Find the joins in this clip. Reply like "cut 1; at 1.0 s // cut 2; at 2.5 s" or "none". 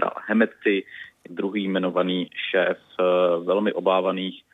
cut 1; at 1.3 s